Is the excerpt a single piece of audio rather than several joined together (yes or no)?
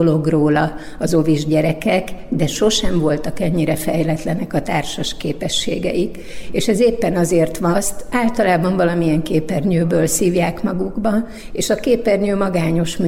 no